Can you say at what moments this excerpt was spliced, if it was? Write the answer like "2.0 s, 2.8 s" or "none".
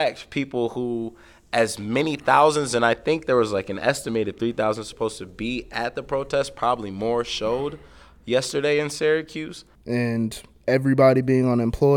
9.7 s